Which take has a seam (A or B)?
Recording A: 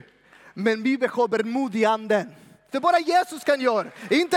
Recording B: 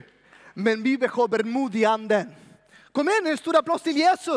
A